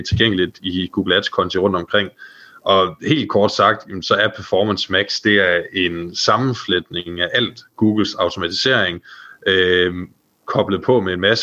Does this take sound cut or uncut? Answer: uncut